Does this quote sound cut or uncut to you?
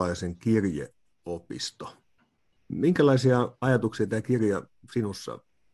uncut